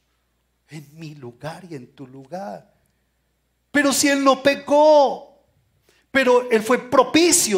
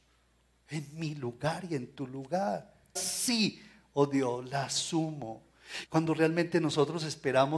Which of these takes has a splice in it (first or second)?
second